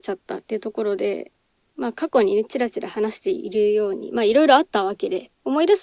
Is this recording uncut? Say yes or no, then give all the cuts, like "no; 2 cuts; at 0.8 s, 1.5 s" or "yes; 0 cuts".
yes; 0 cuts